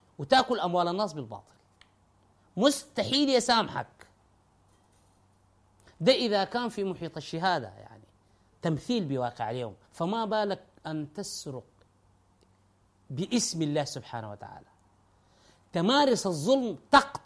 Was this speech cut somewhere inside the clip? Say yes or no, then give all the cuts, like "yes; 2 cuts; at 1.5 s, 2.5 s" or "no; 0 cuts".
yes; 1 cut; at 9.8 s